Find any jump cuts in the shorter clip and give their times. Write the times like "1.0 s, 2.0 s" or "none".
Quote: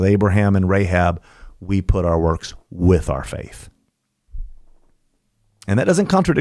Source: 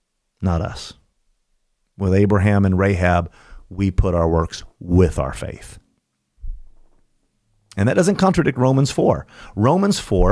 none

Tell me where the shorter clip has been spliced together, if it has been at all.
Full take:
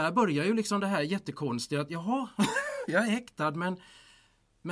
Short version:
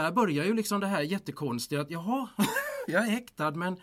none

